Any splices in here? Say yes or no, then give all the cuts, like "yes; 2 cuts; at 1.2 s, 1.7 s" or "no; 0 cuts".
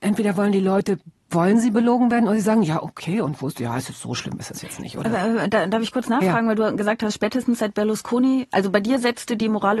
no; 0 cuts